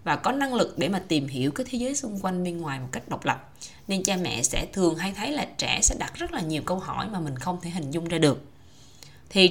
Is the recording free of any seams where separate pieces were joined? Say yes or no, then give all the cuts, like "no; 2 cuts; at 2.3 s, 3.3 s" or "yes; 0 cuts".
yes; 0 cuts